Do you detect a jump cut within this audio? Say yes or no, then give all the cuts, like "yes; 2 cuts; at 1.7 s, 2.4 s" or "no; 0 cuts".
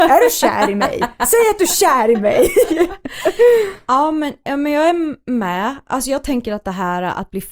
no; 0 cuts